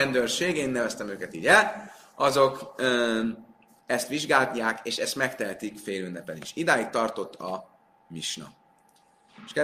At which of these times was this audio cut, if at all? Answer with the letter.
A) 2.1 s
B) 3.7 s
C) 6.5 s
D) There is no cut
D